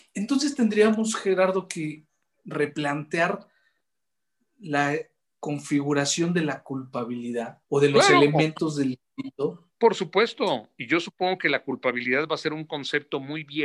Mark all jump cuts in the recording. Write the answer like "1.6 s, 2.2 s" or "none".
7.6 s, 9.7 s